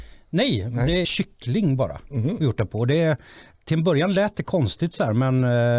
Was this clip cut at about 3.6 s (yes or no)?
no